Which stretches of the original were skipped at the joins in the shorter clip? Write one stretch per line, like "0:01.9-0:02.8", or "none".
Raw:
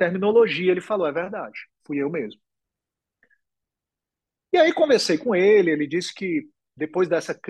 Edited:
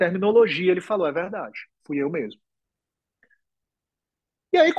none